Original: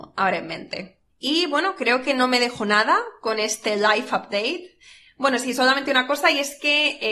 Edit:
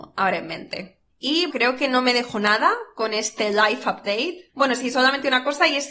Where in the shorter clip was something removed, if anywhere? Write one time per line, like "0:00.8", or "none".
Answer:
0:01.5
0:04.5